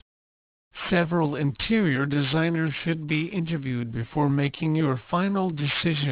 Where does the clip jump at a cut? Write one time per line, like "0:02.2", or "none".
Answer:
none

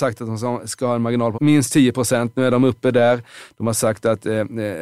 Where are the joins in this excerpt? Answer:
0:01.3

